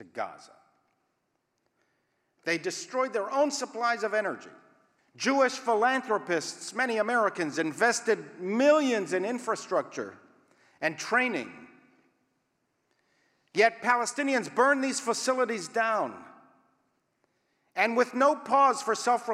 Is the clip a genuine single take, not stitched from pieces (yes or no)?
no